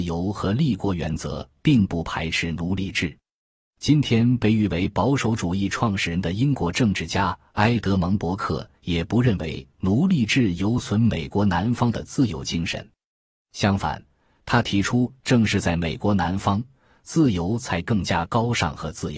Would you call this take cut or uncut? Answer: uncut